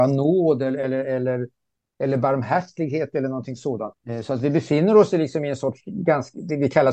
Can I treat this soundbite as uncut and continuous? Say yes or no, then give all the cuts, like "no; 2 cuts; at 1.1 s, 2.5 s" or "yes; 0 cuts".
no; 1 cut; at 3.9 s